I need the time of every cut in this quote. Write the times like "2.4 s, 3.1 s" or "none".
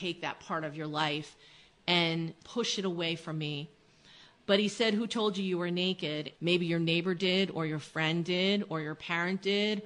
6.3 s